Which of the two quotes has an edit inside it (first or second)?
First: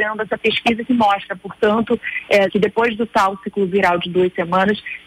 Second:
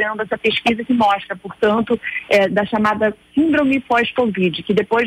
first